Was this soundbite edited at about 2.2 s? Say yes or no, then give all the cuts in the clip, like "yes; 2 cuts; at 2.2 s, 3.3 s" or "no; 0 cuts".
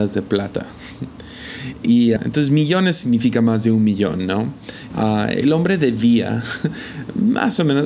yes; 2 cuts; at 2.2 s, 4.9 s